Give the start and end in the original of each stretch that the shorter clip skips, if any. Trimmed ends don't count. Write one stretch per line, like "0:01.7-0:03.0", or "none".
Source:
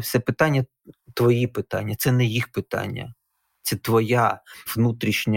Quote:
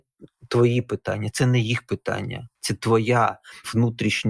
0:03.2-0:03.6